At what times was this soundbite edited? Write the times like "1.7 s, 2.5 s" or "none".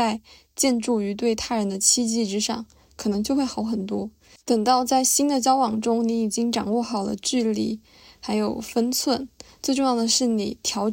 4.4 s